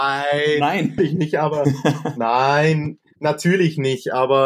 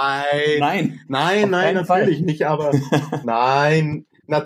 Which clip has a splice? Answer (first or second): first